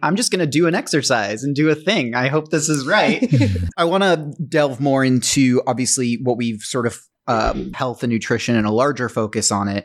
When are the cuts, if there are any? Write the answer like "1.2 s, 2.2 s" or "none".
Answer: 3.7 s, 7.7 s